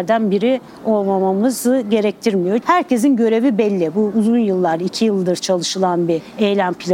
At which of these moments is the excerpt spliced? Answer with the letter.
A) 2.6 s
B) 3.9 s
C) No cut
A